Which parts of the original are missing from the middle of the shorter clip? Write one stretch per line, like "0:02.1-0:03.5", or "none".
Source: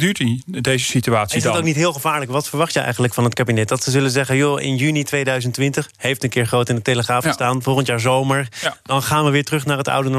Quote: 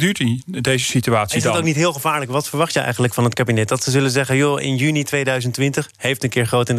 none